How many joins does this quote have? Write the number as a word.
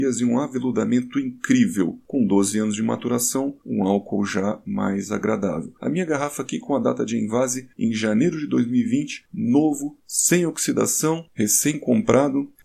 zero